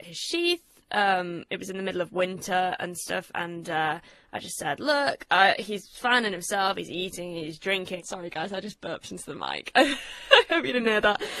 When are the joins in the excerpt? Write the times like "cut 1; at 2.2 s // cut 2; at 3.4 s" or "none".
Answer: cut 1; at 8.0 s